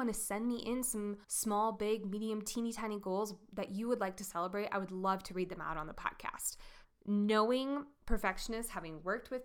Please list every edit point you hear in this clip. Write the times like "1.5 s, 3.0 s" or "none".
1.2 s, 6.8 s